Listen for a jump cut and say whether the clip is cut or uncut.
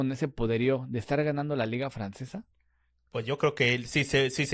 uncut